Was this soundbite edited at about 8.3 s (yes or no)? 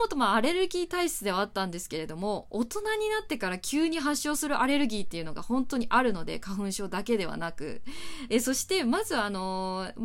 yes